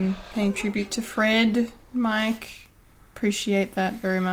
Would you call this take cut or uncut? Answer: uncut